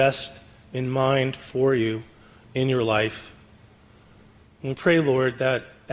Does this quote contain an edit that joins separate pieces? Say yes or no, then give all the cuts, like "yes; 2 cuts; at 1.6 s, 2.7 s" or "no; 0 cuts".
yes; 1 cut; at 4.4 s